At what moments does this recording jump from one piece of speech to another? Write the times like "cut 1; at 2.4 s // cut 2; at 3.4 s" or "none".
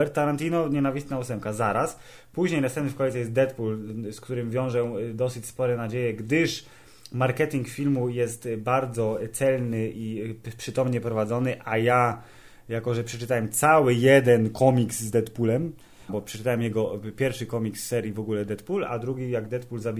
cut 1; at 16.1 s